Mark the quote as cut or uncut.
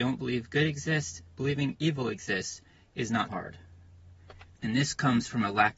cut